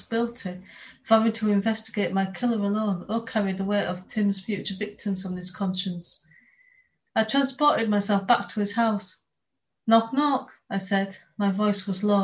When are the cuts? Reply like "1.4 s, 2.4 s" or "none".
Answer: none